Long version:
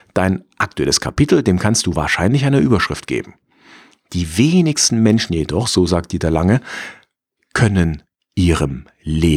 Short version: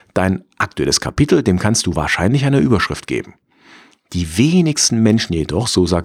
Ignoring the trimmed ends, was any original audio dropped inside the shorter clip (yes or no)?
no